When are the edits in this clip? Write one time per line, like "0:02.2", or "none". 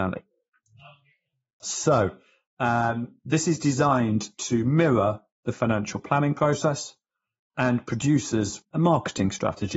0:01.6
0:08.6